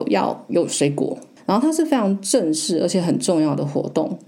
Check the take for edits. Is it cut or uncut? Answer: cut